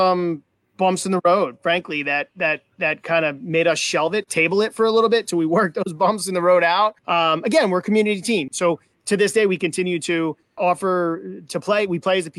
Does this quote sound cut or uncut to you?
cut